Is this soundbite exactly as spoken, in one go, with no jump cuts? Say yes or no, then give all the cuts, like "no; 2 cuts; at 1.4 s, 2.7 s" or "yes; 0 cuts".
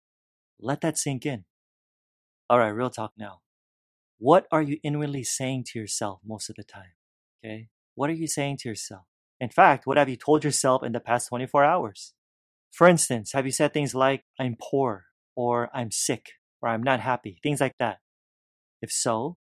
yes; 0 cuts